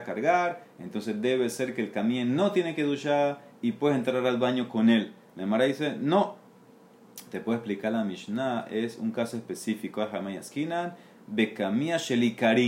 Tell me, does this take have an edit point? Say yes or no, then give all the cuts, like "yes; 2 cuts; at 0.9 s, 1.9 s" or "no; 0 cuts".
no; 0 cuts